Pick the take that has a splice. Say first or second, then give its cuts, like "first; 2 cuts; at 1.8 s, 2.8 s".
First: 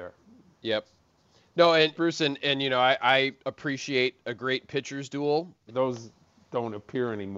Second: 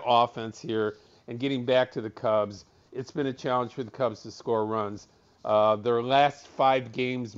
first; 3 cuts; at 2.0 s, 3.4 s, 5.7 s